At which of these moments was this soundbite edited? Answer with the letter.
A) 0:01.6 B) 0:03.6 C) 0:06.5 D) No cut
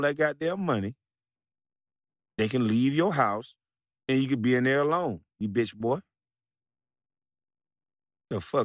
D